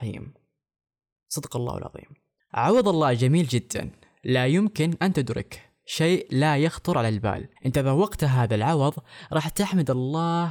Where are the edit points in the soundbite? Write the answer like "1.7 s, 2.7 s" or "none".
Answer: 7.6 s